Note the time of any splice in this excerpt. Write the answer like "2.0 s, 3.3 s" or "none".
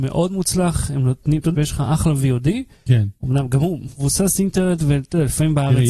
1.5 s